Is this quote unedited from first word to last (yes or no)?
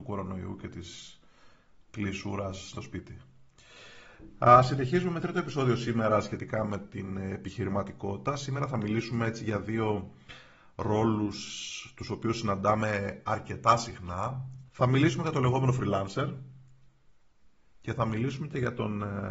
no